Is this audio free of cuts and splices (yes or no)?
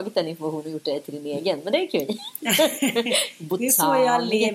yes